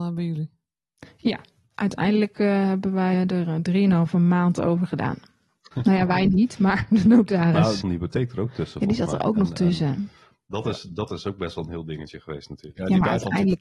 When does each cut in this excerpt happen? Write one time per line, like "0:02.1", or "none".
0:03.1
0:05.7
0:07.8

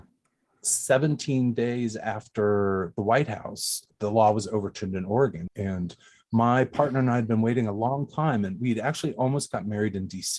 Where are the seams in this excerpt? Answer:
0:05.5

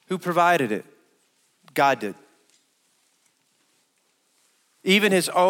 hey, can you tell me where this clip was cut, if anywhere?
none

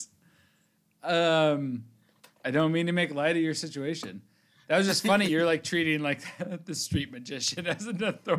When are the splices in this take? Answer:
none

